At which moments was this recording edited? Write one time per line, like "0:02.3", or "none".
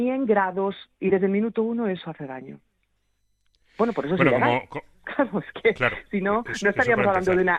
0:00.9